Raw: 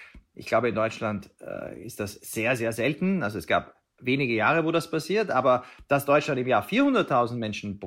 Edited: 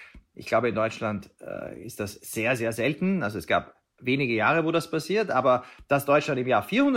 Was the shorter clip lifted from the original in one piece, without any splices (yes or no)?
yes